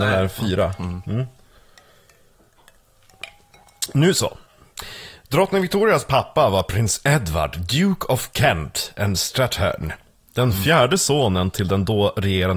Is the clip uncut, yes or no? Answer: yes